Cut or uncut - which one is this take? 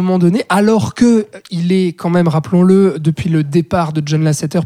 uncut